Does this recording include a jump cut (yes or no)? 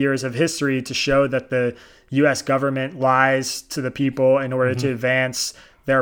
no